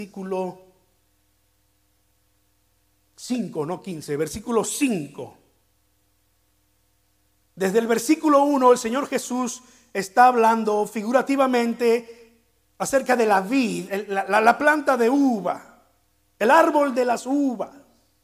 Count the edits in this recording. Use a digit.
1